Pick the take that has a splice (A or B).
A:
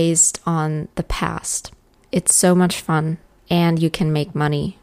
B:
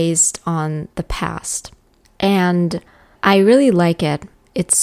A